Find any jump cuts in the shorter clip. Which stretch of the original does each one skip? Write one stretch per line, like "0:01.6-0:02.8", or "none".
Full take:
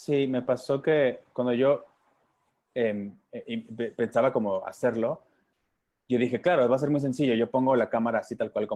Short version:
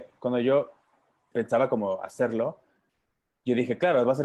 0:02.4-0:03.9